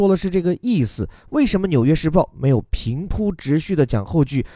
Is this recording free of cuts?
yes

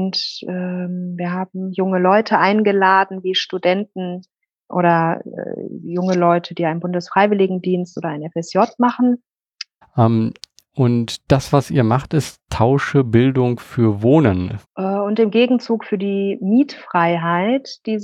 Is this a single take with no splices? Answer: no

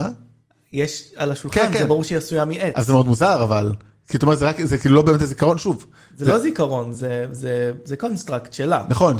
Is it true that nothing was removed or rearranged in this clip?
yes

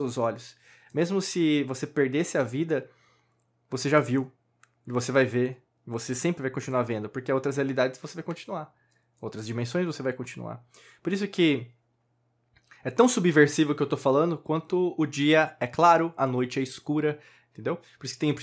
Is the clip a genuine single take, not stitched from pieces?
yes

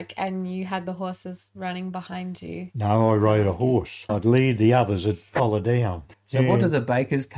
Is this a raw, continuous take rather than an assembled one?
no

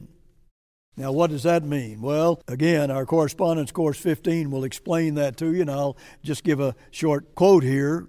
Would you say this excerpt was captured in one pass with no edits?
no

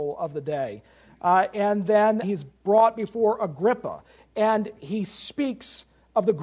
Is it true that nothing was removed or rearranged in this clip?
no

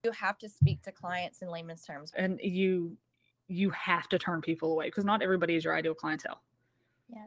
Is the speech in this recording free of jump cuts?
no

